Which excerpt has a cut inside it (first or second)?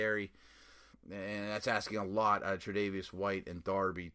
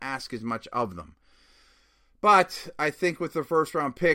first